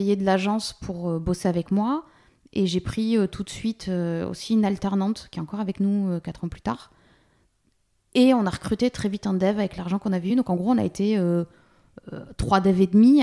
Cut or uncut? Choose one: uncut